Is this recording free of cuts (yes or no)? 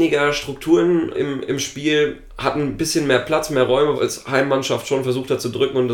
no